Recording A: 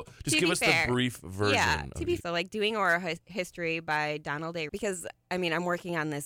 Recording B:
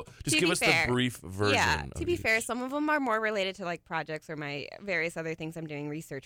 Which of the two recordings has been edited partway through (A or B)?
A